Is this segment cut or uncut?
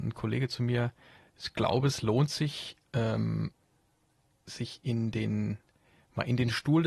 cut